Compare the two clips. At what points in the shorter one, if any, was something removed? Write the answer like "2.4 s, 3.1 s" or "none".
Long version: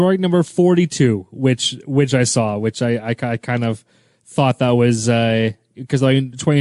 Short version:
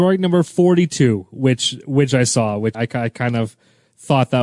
2.7 s